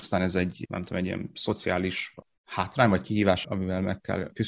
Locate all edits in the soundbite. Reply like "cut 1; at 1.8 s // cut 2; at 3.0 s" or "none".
cut 1; at 3.4 s